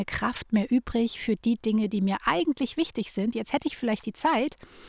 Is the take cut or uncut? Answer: uncut